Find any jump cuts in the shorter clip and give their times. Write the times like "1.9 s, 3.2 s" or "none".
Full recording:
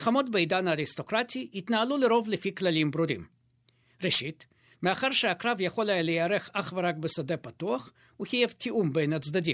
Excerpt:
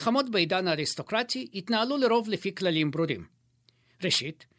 none